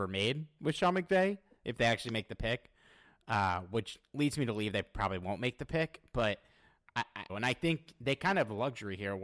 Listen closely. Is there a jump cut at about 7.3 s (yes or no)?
yes